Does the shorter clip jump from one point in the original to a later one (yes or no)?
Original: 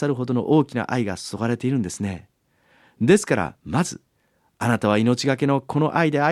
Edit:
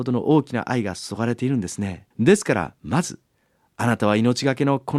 yes